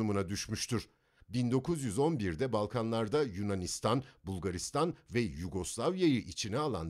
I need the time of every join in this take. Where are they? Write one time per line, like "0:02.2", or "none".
0:01.2

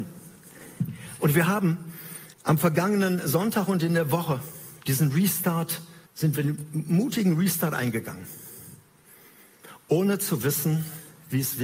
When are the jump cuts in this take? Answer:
0:02.3
0:06.1

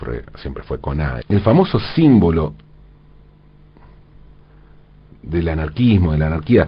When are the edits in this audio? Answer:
0:01.2

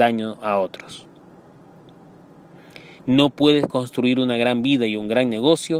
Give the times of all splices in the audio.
0:03.0

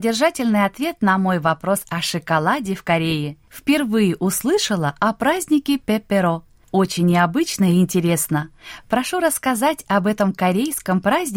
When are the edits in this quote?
none

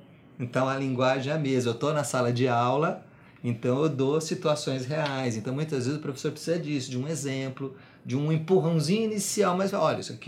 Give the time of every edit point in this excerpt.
none

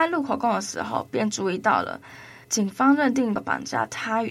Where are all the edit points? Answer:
0:02.4

